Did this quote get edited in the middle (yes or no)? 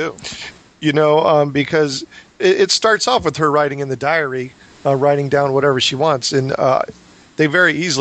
no